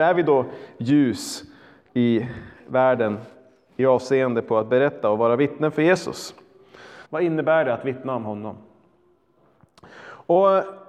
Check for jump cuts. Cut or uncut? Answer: cut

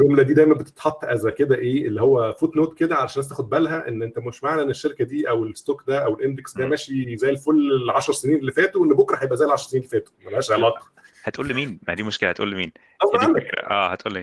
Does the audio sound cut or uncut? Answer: uncut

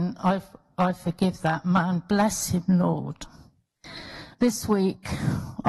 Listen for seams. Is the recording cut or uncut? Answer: cut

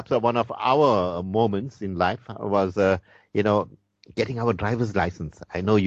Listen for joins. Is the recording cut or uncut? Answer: uncut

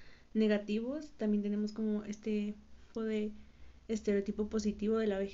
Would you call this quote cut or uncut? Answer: cut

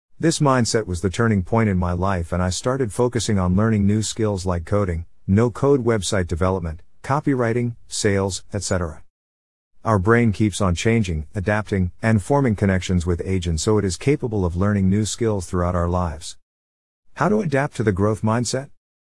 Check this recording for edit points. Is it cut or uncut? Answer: uncut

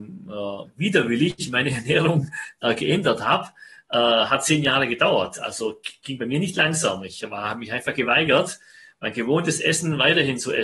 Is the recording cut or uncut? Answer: uncut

